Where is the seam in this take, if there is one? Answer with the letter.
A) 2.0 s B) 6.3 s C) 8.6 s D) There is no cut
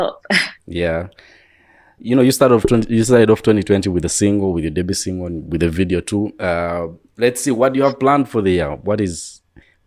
A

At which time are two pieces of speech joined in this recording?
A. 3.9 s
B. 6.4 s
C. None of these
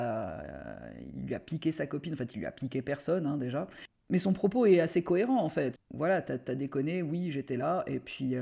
C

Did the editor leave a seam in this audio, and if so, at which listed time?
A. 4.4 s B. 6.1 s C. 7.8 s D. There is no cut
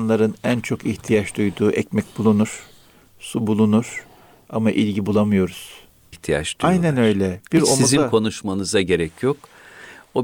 B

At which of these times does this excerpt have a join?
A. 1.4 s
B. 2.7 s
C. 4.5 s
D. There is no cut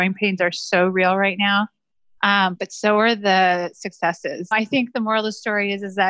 C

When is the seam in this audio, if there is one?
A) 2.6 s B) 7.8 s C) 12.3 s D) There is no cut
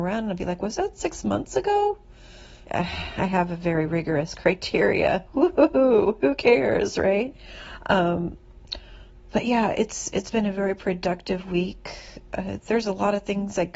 A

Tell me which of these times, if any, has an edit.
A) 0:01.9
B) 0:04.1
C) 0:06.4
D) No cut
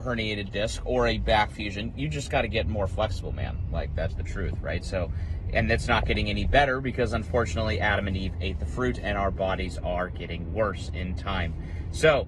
B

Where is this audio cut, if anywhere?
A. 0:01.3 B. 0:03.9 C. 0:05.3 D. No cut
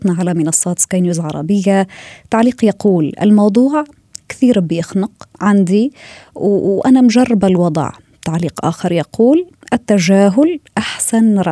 C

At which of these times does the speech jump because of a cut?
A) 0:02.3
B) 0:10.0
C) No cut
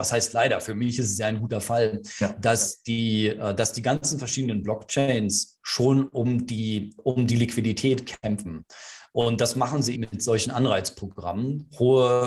B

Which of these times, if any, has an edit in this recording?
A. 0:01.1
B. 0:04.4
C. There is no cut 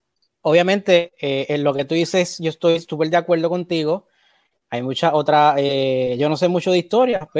C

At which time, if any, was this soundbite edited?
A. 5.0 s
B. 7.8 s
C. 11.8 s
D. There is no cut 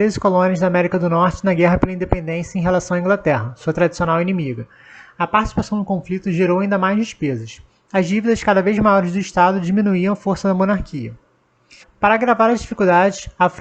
C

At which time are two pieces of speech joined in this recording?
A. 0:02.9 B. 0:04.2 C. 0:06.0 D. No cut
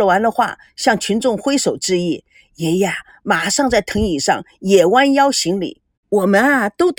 C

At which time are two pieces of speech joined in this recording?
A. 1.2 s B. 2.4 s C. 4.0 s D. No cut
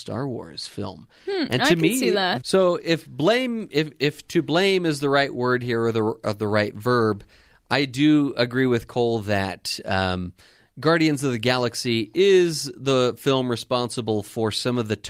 B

